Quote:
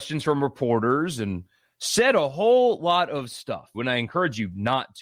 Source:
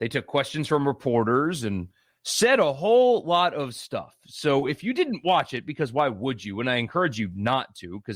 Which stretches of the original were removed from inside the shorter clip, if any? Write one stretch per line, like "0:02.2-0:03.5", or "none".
0:04.2-0:06.5